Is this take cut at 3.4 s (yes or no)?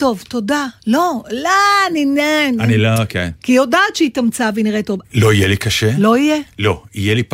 yes